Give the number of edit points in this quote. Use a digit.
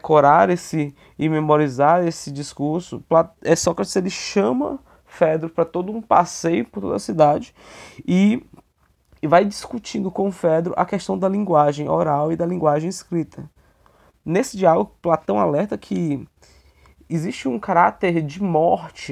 0